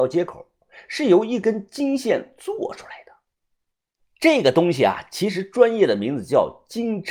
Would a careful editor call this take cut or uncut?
cut